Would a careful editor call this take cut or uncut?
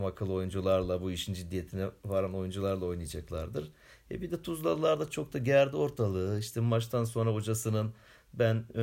uncut